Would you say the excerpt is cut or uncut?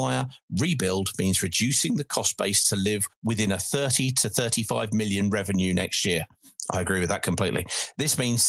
uncut